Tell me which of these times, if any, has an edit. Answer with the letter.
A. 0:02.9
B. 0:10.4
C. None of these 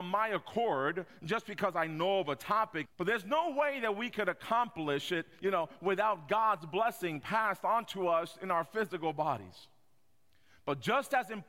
A